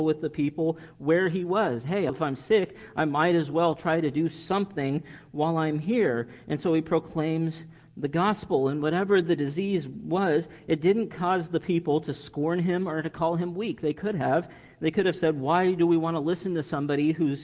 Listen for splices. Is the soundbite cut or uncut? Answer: cut